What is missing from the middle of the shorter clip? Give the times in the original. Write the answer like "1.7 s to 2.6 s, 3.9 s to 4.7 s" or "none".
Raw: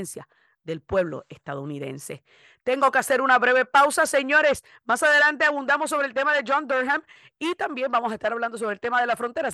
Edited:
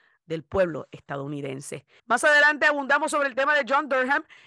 2.4 s to 4.8 s

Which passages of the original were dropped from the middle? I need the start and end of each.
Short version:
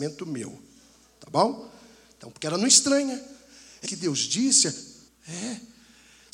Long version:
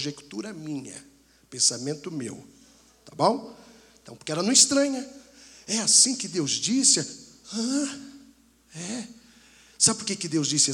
5.7 s to 6.2 s, 7.4 s to 8.5 s

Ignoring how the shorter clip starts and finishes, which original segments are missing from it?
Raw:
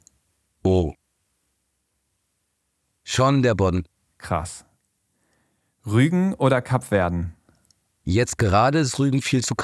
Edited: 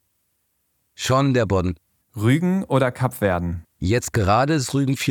4.1 s to 5.7 s, 7.3 s to 7.9 s

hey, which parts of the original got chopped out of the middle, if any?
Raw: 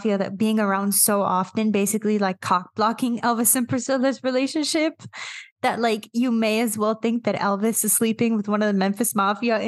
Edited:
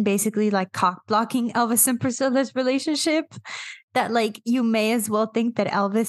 none

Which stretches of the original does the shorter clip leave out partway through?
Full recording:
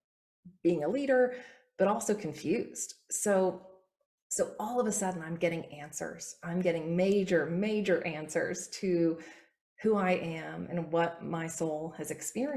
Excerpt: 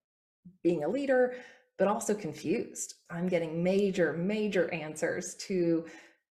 3.1 s to 6.4 s

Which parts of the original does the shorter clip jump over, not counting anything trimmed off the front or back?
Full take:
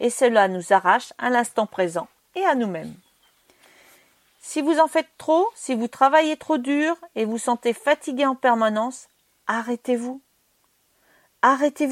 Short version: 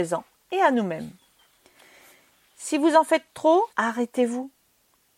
5.5 s to 9.4 s

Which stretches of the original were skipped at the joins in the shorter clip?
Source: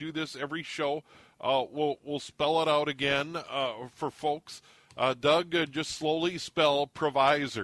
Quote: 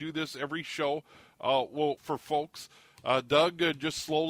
2.0 s to 3.9 s

